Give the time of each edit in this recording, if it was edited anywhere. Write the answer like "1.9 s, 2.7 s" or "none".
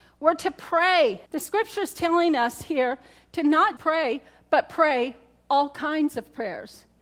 1.3 s, 3.8 s